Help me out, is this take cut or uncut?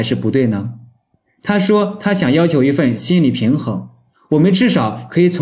uncut